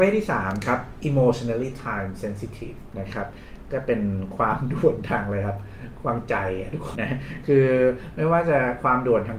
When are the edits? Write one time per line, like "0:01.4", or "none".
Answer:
0:06.9